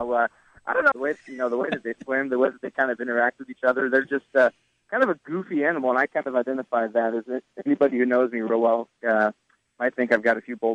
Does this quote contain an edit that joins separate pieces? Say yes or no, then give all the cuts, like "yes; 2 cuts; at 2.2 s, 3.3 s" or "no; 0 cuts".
yes; 1 cut; at 0.9 s